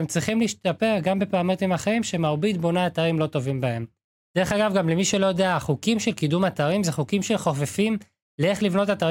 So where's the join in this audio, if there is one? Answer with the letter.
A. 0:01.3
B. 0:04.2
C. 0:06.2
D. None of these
B